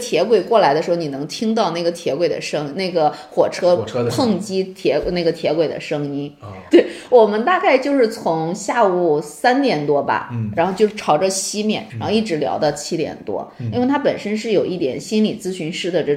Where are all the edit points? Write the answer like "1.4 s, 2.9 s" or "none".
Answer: 6.7 s, 11.9 s

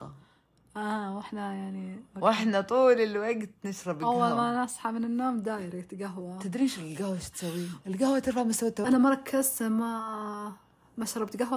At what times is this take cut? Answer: 7.8 s, 8.8 s

